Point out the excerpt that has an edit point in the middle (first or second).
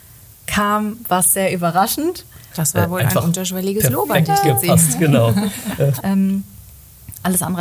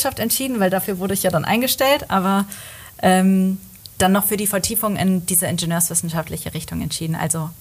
first